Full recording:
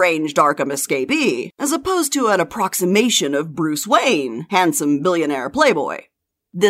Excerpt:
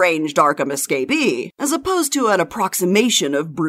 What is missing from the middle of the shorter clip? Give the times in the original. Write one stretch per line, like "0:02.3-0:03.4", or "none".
none